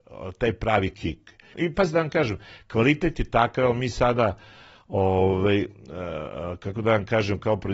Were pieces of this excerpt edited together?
yes; 1 cut; at 1.5 s

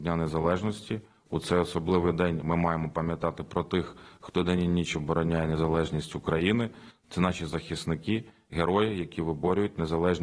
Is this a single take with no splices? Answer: yes; 0 cuts

